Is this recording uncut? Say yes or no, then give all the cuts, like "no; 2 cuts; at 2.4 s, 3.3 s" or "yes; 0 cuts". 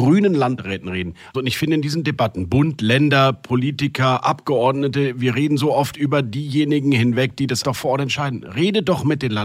no; 2 cuts; at 1.3 s, 7.6 s